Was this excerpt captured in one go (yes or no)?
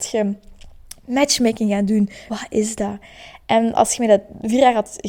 no